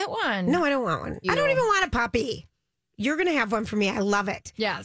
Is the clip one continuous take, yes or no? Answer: no